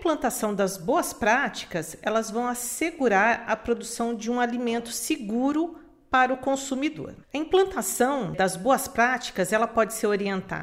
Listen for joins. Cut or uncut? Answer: cut